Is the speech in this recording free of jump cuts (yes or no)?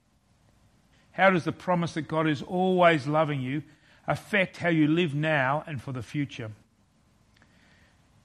no